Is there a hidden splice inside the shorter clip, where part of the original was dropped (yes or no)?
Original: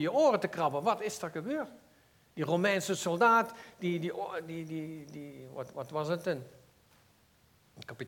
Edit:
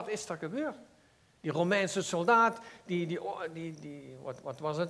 yes